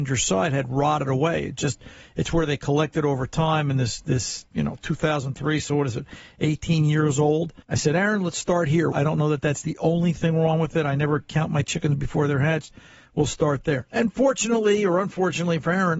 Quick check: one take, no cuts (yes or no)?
no